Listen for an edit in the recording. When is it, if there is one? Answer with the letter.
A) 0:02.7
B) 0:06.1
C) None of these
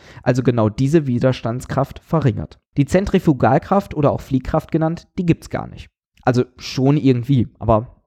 A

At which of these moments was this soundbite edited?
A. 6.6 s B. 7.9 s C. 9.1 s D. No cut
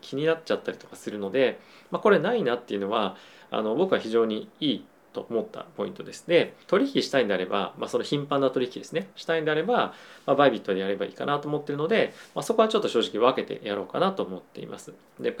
A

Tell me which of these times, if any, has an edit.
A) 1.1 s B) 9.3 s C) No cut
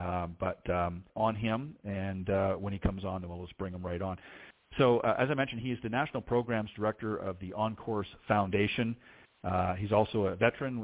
A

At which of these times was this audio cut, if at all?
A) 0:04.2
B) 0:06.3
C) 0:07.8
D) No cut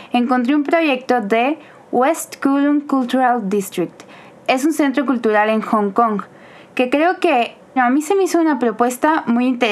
C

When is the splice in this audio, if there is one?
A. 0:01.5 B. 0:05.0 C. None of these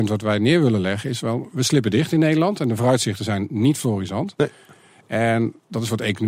A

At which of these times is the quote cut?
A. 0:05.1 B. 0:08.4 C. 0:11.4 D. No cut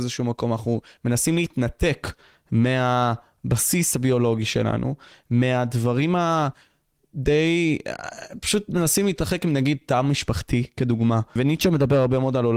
C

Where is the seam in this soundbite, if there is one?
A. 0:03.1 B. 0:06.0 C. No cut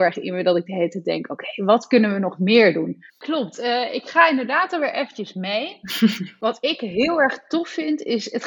A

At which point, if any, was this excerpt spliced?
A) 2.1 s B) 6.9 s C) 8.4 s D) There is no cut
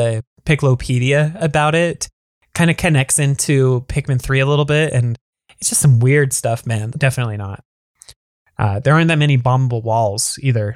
B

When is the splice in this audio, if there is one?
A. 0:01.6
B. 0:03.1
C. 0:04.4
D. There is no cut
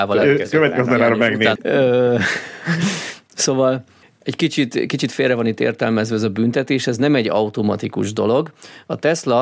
A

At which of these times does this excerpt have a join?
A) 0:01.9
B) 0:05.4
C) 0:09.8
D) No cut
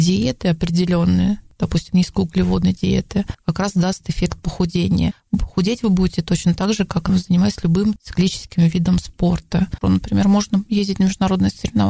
C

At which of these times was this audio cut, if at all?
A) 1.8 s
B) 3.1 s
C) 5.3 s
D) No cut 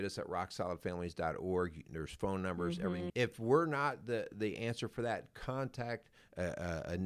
B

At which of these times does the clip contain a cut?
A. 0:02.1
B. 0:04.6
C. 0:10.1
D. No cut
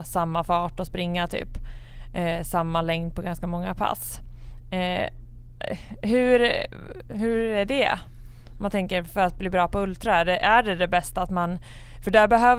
D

